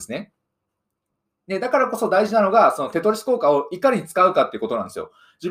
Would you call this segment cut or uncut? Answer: uncut